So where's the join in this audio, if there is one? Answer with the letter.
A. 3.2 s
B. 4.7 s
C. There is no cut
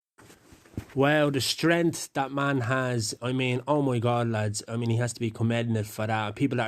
C